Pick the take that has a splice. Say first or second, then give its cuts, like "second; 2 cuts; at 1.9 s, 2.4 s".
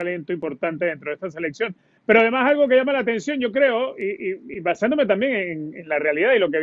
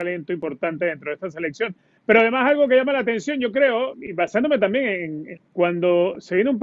second; 2 cuts; at 3.9 s, 5.4 s